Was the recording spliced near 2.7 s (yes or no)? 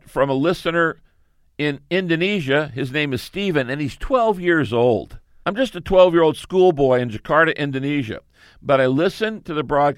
no